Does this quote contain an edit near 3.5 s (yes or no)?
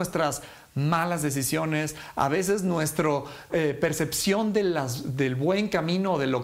yes